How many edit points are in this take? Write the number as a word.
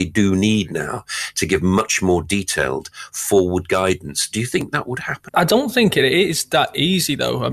one